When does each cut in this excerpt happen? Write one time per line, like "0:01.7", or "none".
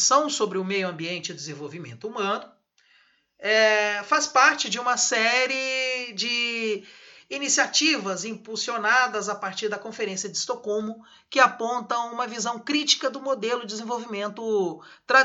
none